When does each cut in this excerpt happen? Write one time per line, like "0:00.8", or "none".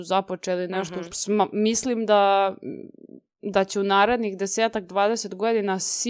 0:01.1